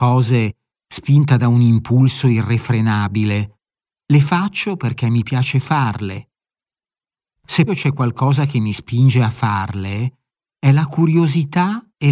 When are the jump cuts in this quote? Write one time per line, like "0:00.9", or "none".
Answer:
0:07.7

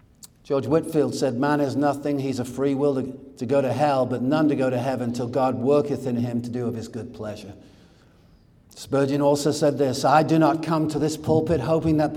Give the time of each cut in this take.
none

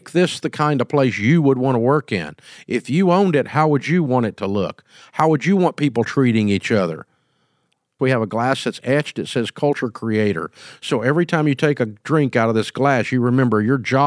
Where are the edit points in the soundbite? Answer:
0:08.0

